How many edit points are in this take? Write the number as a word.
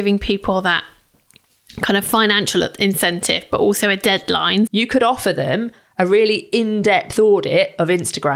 one